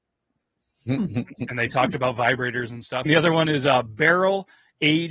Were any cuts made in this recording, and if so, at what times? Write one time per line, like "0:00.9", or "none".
0:03.1